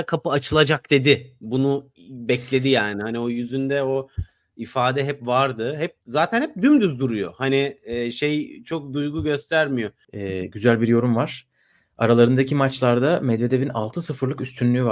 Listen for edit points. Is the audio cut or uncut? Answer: cut